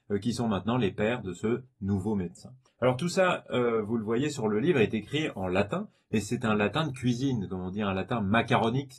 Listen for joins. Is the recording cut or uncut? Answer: cut